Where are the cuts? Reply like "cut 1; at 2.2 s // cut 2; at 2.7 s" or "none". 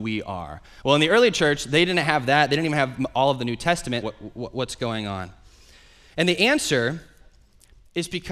cut 1; at 4.0 s